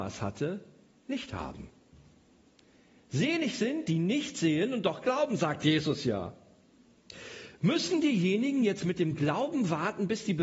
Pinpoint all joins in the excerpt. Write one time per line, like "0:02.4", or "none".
none